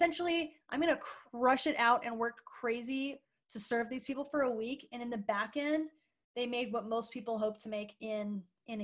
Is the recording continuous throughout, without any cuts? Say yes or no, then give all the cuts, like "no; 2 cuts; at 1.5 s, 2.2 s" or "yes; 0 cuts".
yes; 0 cuts